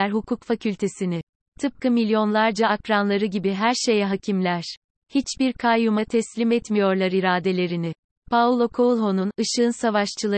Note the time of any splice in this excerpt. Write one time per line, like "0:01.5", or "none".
none